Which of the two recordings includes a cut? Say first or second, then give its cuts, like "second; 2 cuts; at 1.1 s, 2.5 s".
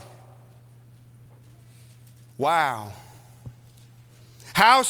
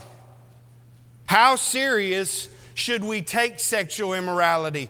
second; 1 cut; at 1.3 s